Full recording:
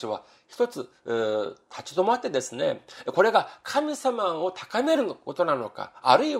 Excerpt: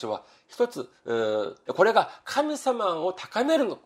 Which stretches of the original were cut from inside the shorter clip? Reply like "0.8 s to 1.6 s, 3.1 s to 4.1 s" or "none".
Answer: 1.7 s to 3.0 s